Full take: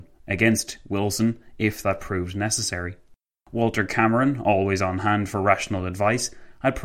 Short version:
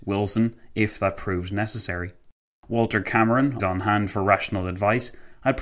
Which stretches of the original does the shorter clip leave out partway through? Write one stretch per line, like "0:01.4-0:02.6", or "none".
0:04.4-0:04.8